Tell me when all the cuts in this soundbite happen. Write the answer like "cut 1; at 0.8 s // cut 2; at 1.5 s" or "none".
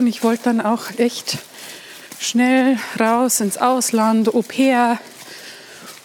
none